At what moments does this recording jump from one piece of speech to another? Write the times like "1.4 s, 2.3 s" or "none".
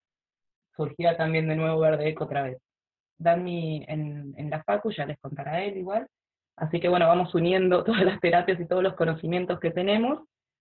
3.0 s, 6.4 s